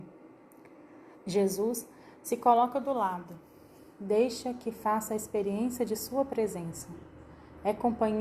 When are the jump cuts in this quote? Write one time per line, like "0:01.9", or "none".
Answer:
0:01.1